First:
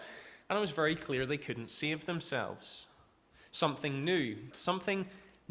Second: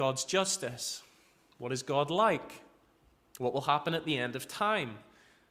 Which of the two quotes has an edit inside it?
first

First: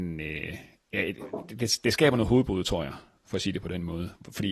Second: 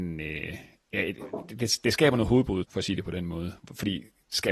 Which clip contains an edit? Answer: second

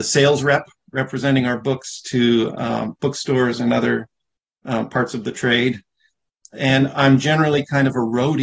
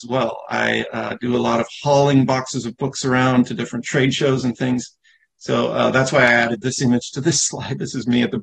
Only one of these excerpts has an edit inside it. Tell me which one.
first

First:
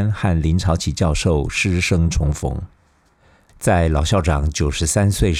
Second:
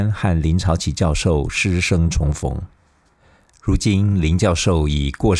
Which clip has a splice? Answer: first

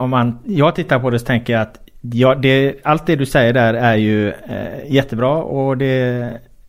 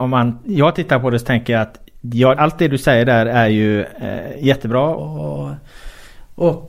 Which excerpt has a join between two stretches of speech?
second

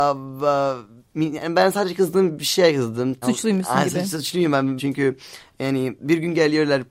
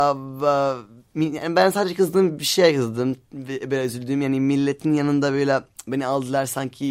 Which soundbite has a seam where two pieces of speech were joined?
first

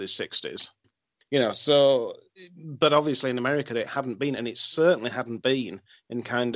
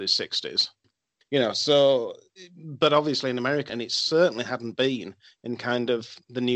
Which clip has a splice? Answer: second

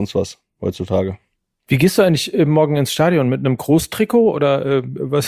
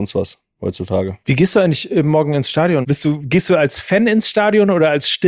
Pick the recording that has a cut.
second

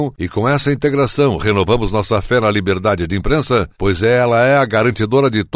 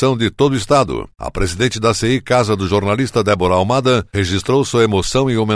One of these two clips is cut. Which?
second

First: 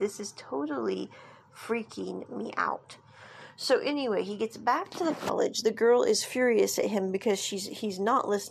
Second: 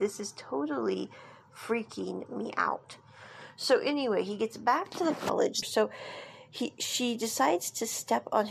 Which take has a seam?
second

